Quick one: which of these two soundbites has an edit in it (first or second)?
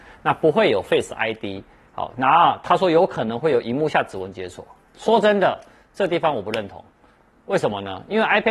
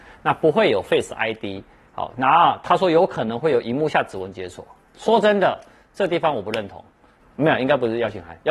second